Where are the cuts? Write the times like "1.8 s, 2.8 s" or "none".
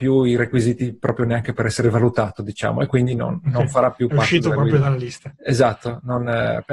none